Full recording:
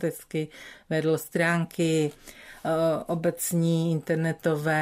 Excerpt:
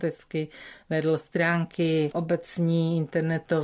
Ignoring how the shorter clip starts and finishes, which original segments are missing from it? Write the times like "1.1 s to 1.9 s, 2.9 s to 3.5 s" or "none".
2.1 s to 3.1 s